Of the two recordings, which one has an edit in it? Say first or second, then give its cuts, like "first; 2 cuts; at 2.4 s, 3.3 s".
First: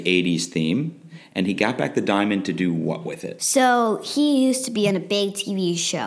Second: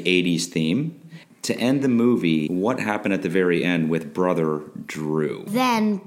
second; 1 cut; at 1.2 s